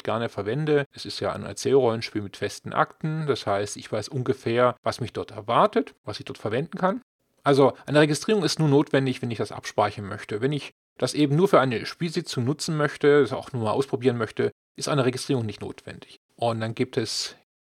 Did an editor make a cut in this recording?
yes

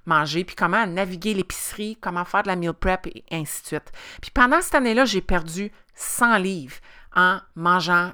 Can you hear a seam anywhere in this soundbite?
no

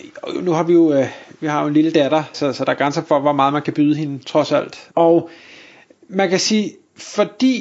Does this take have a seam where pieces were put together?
yes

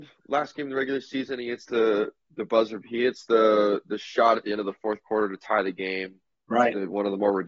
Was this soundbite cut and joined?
no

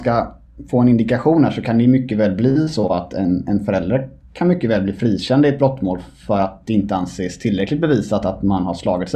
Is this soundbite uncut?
yes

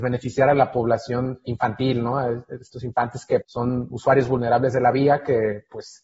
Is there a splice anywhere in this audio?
yes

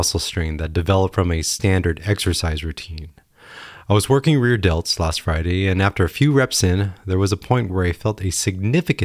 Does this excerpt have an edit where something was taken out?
no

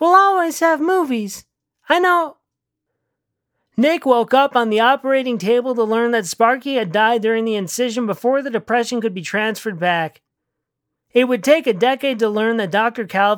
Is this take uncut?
yes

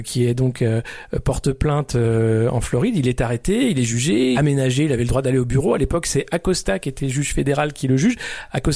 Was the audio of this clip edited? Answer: yes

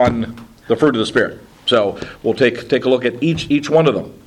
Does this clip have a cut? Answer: no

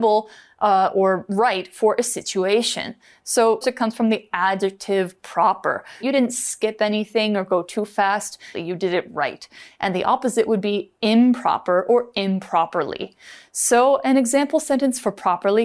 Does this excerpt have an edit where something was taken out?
yes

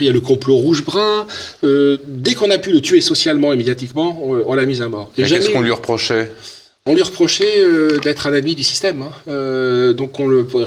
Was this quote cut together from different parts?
no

